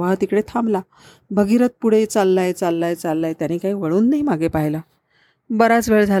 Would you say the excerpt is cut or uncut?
uncut